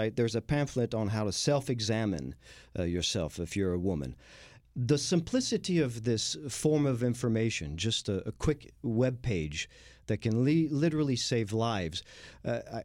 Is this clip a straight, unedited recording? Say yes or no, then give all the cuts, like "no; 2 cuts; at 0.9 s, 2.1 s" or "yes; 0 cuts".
yes; 0 cuts